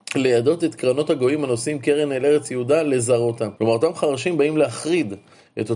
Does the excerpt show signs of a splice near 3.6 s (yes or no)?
yes